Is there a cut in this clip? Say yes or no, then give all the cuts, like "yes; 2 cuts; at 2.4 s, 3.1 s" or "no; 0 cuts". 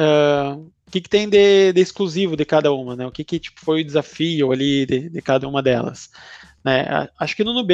no; 0 cuts